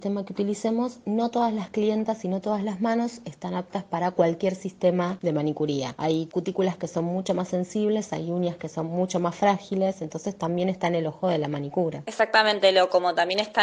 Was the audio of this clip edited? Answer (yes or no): no